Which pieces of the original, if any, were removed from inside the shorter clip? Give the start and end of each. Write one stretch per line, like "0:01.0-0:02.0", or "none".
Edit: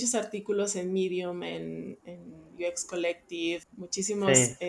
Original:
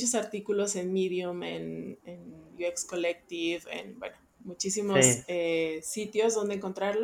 0:03.6-0:04.3